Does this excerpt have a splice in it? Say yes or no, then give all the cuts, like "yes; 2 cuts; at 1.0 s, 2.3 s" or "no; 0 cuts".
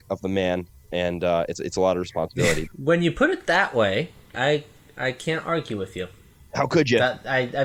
yes; 2 cuts; at 2.7 s, 4.3 s